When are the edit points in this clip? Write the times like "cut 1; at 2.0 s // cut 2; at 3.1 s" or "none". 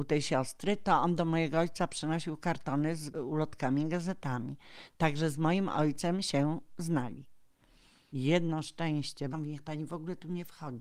cut 1; at 8.1 s // cut 2; at 9.3 s